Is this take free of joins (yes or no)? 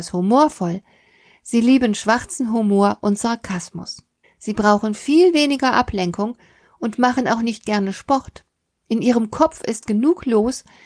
no